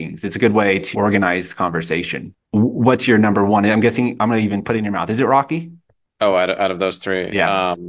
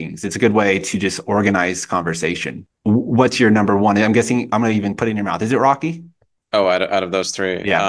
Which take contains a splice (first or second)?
first